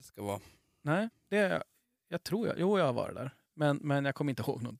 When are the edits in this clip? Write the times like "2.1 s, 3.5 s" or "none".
1.1 s, 3.5 s